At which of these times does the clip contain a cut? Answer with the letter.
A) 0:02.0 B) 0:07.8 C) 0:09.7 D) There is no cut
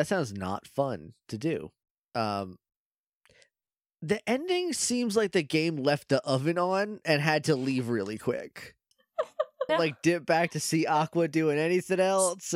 C